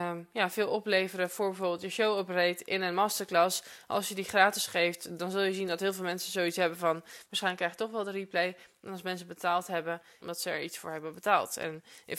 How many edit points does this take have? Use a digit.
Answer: 1